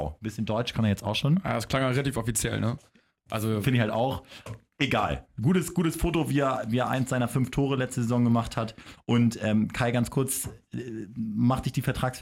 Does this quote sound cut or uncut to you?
uncut